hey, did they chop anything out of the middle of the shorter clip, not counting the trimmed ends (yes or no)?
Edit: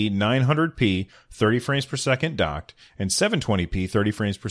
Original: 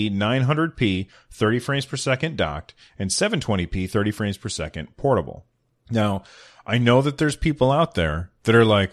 no